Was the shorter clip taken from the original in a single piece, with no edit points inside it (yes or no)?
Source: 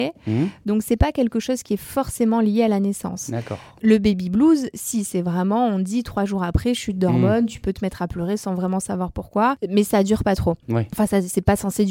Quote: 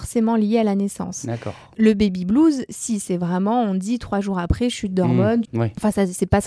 no